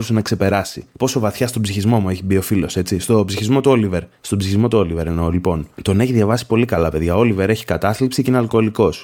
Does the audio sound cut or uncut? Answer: uncut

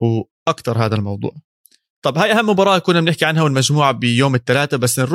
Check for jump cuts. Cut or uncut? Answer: uncut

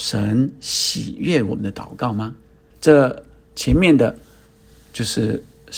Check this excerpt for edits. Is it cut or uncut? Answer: cut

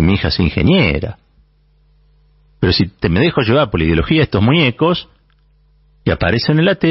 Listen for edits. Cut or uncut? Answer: cut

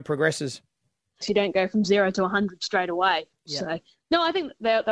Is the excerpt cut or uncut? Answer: cut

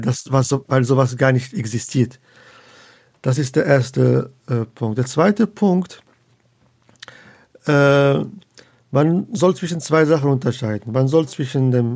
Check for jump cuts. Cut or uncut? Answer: uncut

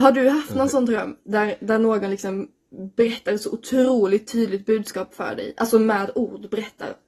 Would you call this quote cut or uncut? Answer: uncut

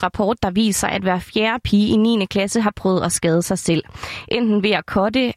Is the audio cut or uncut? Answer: uncut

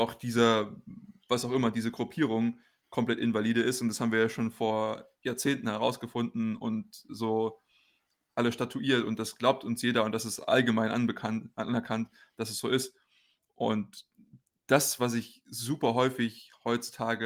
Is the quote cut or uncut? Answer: cut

